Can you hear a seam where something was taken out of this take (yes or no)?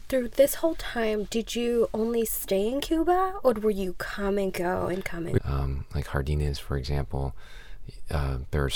yes